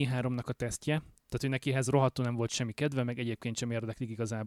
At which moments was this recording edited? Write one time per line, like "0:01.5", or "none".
0:01.2